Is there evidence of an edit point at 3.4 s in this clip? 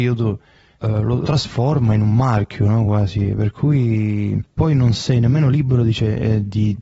no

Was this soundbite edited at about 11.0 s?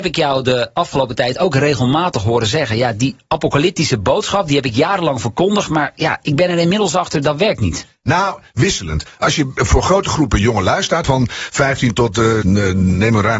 yes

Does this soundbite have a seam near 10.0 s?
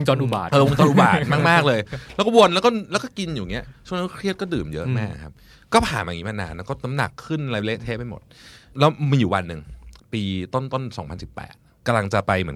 yes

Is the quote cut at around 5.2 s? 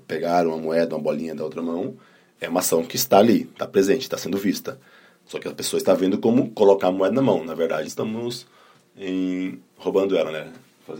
no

